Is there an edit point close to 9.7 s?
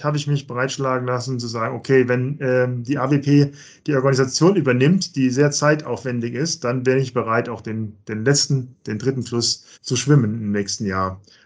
yes; 1 cut; at 9.7 s

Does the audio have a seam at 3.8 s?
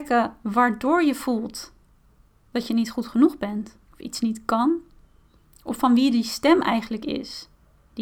yes; 1 cut; at 3.8 s

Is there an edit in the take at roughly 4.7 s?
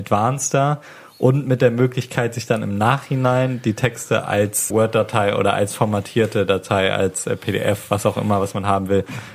yes; 1 cut; at 4.7 s

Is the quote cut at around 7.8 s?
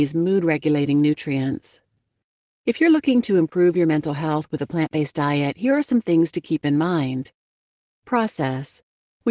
no; 1 cut; at 2.4 s

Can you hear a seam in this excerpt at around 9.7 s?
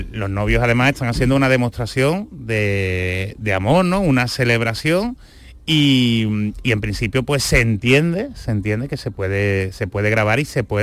no; 0 cuts

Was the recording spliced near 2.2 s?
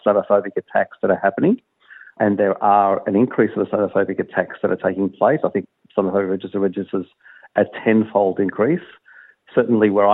yes; 1 cut; at 2.2 s

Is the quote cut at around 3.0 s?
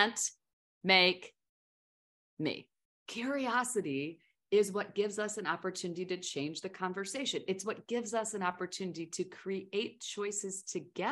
yes; 1 cut; at 3.0 s

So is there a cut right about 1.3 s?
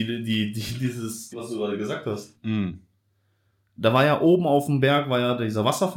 yes; 2 cuts; at 1.3 s, 2.4 s

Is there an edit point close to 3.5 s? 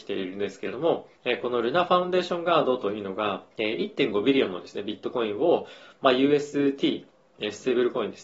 yes; 2 cuts; at 1.2 s, 3.5 s

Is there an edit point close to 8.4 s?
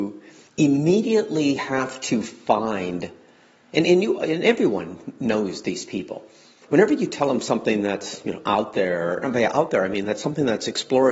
no; 0 cuts

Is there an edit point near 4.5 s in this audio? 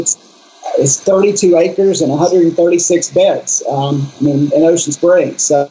yes; 1 cut; at 4.5 s

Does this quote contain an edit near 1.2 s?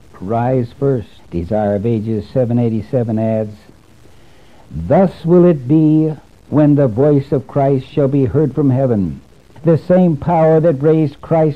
yes; 2 cuts; at 1.2 s, 9.6 s

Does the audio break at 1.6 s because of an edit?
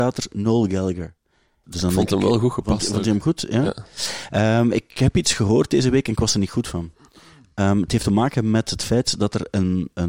yes; 1 cut; at 1.6 s

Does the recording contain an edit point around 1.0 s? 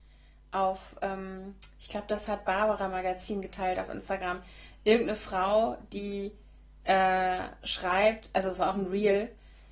no; 0 cuts

